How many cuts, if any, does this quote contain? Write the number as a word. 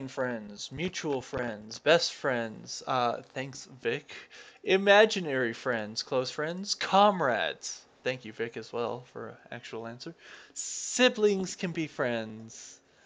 zero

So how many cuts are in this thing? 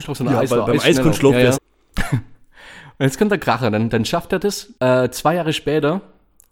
two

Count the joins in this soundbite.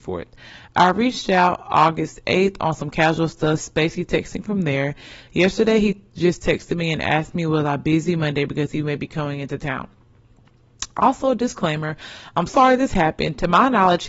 one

